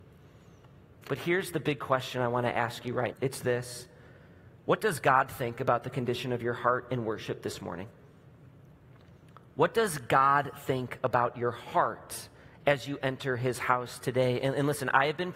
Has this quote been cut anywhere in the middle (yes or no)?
yes